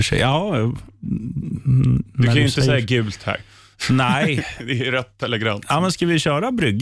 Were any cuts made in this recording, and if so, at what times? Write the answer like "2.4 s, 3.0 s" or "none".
none